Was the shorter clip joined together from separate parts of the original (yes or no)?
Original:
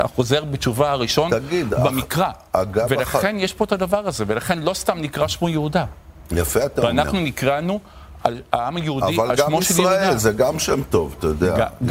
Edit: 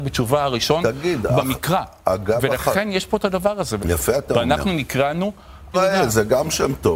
yes